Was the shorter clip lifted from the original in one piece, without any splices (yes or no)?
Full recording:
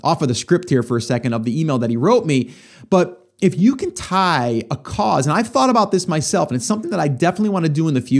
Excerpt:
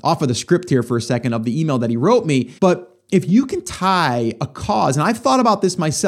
no